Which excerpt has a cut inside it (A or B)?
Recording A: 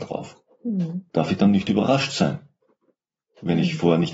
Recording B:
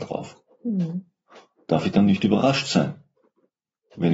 A